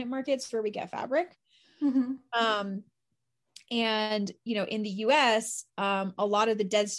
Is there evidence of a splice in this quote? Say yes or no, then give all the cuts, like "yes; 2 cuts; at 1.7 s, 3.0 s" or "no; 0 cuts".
no; 0 cuts